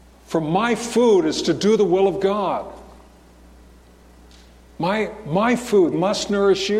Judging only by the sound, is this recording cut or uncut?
cut